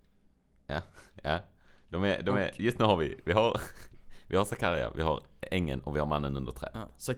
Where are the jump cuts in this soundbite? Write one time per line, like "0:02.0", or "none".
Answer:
none

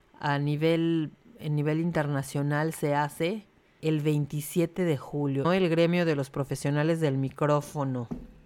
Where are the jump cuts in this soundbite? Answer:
0:03.8
0:05.4

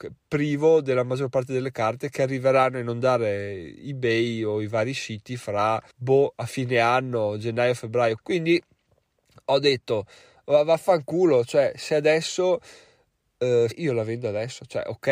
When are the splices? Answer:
0:05.9
0:08.2
0:13.7

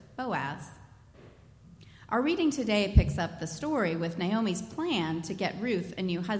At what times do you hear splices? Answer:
none

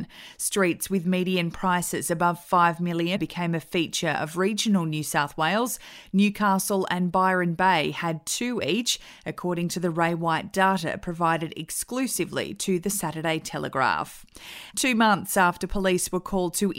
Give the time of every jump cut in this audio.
0:03.2
0:14.7

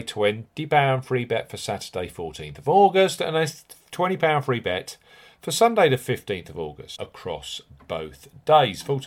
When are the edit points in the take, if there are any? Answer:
0:06.9

